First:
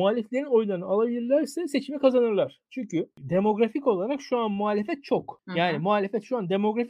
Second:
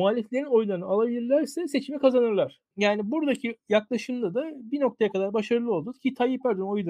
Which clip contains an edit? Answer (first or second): second